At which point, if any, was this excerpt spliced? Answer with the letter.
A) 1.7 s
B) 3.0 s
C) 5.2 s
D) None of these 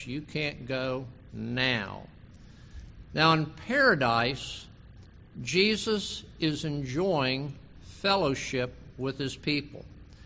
B